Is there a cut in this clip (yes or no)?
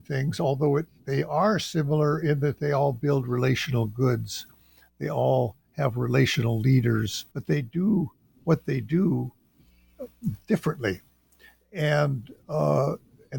yes